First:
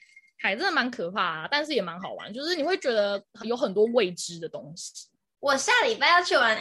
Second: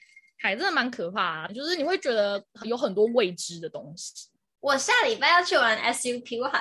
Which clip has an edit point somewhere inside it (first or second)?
second